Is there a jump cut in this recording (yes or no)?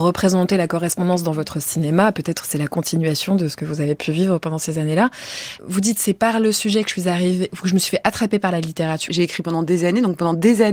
yes